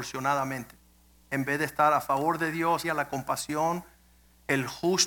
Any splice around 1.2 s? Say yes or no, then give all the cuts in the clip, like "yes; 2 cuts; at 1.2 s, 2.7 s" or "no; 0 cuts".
no; 1 cut; at 2.8 s